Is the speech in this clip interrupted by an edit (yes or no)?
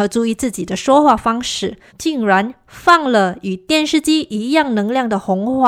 yes